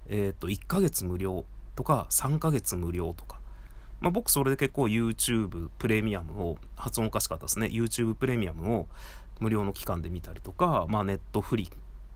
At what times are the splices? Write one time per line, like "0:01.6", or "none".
0:09.4